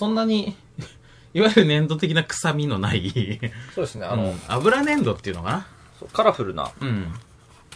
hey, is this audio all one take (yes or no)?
yes